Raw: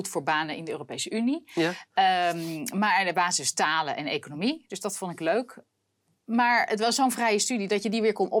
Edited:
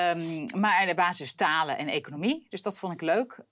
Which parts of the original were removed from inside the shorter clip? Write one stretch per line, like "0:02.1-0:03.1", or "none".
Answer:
none